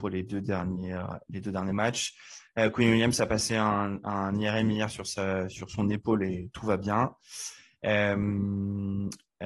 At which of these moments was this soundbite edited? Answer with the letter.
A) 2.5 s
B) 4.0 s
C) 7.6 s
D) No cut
D